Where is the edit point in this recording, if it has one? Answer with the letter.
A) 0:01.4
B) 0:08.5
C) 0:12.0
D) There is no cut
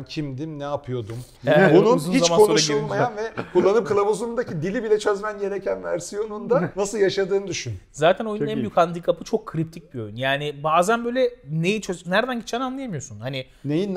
C